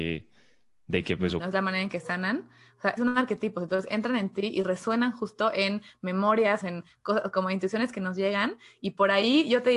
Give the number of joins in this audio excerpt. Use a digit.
3